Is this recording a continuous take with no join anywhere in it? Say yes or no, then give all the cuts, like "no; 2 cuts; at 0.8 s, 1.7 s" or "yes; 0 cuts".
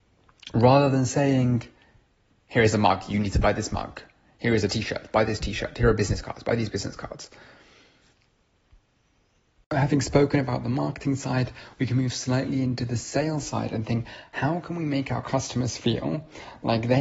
yes; 0 cuts